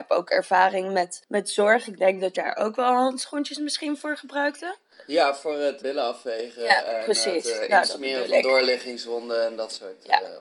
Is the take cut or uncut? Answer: cut